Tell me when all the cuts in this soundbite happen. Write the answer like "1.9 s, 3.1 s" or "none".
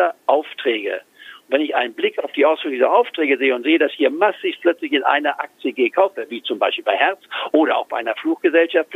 none